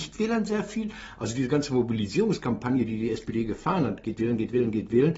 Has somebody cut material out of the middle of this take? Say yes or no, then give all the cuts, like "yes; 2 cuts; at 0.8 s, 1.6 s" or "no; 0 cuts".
no; 0 cuts